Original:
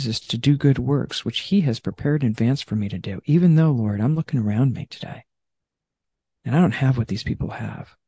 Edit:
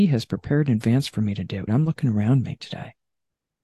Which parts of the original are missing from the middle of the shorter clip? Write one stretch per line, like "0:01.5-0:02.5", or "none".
0:03.2-0:04.0